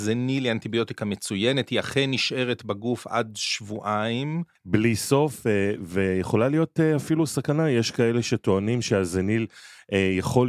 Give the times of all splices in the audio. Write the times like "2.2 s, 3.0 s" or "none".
4.6 s